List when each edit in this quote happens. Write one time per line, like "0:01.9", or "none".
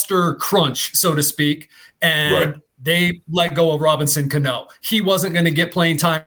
none